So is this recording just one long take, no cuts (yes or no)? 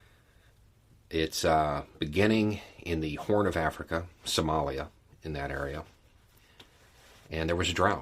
yes